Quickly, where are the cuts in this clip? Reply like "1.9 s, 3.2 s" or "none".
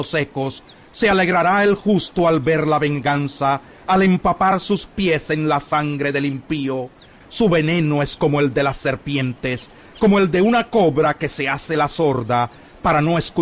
7.2 s